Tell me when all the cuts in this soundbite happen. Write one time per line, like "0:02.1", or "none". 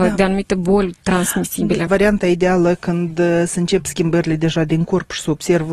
none